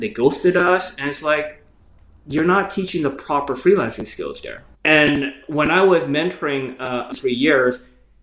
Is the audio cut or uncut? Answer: cut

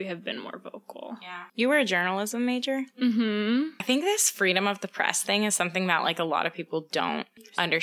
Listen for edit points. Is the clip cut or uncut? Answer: uncut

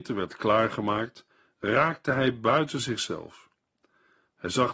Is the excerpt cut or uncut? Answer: uncut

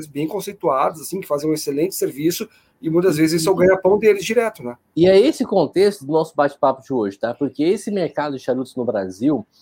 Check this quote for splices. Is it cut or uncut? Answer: uncut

